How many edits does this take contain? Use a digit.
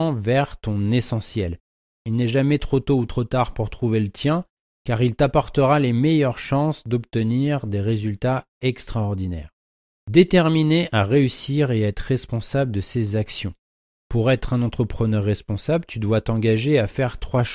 0